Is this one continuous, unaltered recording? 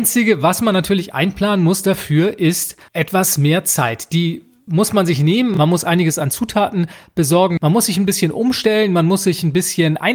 yes; 0 cuts

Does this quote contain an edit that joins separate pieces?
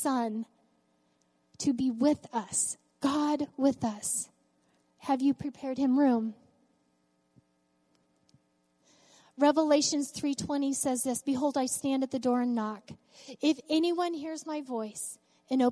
no; 0 cuts

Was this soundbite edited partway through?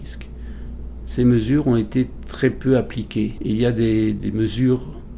yes; 1 cut; at 3.4 s

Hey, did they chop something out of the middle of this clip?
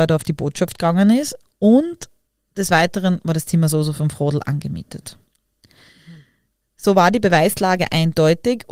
no; 0 cuts

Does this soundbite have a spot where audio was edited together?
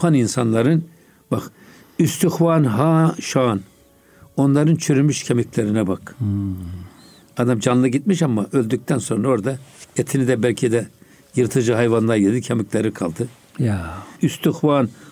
no; 0 cuts

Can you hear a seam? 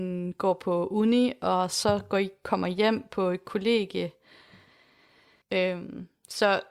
yes; 1 cut; at 5.4 s

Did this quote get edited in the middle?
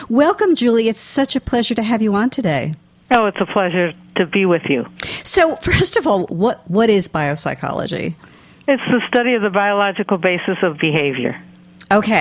no; 0 cuts

